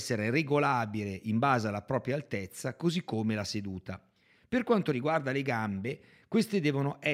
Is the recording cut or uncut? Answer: uncut